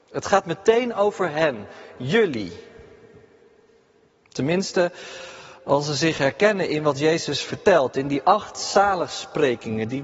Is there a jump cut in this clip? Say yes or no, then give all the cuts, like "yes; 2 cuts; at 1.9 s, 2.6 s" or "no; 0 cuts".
no; 0 cuts